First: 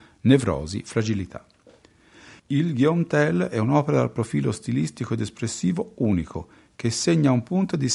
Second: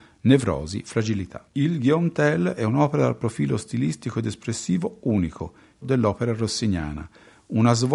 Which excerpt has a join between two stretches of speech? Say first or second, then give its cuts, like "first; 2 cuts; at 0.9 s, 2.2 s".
second; 2 cuts; at 1.5 s, 5.8 s